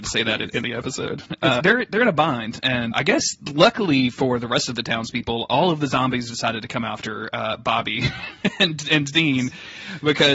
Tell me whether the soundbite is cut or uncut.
cut